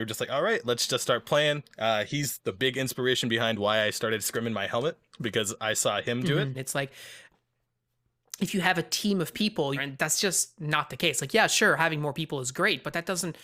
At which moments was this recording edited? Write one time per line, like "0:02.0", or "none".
0:06.5
0:09.8